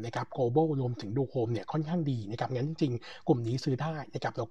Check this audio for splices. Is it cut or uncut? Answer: uncut